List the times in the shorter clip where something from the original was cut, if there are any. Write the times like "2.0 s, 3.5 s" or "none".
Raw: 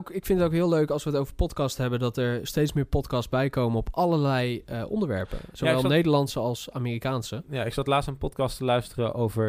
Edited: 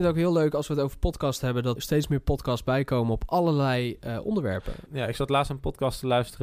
1.8 s, 4.9 s